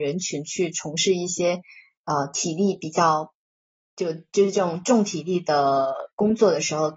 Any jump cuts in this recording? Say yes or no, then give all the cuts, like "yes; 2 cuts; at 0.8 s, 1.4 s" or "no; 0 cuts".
no; 0 cuts